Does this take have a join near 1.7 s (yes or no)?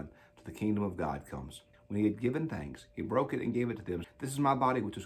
yes